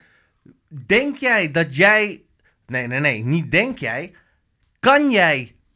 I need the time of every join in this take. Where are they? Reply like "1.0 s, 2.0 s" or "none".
none